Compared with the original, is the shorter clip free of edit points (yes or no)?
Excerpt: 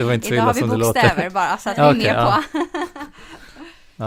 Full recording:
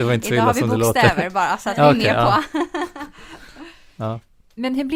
yes